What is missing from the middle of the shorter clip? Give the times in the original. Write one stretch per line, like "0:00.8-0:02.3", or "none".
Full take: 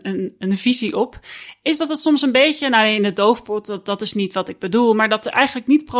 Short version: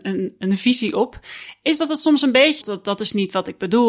0:02.6-0:03.6